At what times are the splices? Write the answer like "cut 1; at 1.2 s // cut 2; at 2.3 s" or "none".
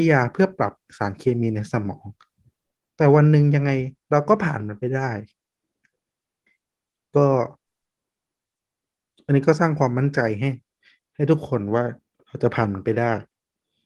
none